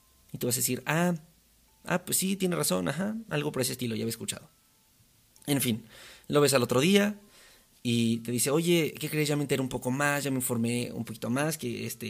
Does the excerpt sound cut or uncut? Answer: uncut